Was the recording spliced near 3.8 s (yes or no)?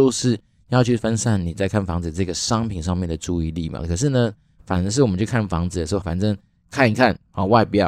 yes